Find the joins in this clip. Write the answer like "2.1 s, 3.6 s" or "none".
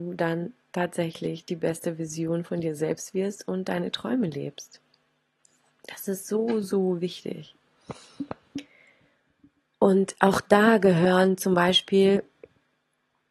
6.6 s